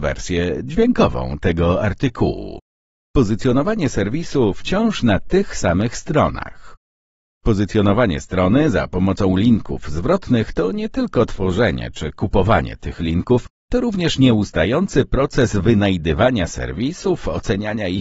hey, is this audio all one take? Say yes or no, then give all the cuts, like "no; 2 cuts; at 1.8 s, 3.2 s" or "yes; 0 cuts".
yes; 0 cuts